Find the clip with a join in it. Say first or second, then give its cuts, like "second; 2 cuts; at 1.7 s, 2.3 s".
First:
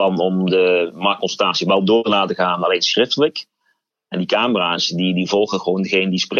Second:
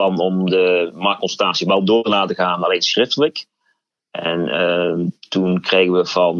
first; 1 cut; at 3.9 s